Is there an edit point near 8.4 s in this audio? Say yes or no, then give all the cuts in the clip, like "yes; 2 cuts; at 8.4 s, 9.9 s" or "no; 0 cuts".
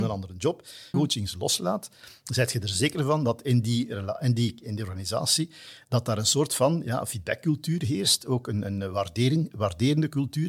no; 1 cut; at 0.9 s